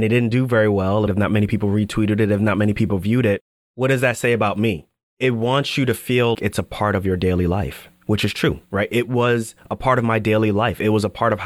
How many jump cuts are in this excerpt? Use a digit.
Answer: 3